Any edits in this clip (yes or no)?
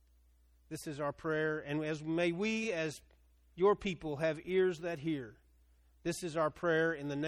no